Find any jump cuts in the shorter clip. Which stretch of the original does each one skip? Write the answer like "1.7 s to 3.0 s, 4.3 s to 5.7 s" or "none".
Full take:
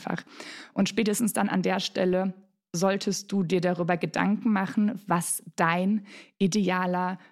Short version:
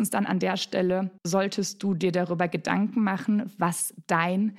2.4 s to 2.7 s

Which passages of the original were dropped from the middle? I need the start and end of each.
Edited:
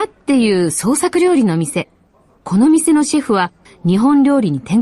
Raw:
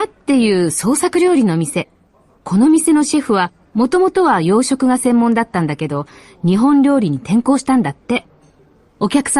3.6 s to 6.2 s

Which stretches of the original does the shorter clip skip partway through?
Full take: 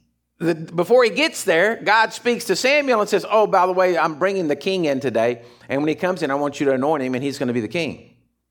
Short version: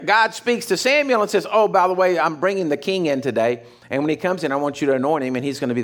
none

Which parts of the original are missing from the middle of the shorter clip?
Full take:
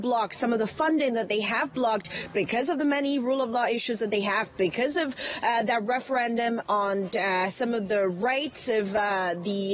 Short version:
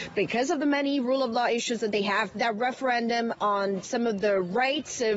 4.5 s to 5.6 s, 7.1 s to 7.5 s

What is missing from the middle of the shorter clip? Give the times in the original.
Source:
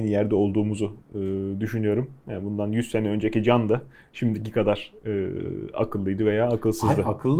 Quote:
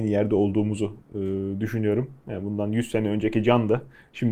none

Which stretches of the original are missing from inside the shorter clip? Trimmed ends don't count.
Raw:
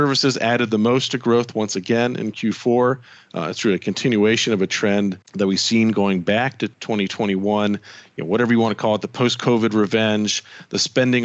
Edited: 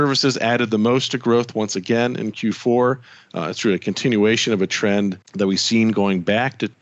none

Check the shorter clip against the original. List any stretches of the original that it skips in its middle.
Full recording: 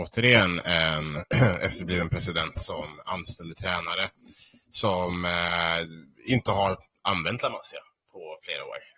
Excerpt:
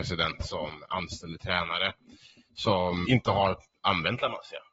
5.2 s to 6.3 s

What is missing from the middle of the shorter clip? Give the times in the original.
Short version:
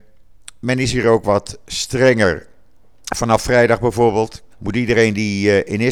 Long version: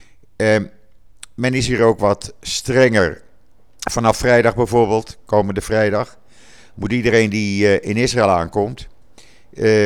5.3 s to 6.7 s

